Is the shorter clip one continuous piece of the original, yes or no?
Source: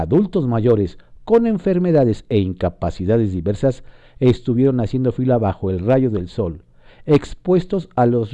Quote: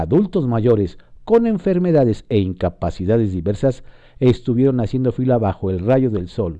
yes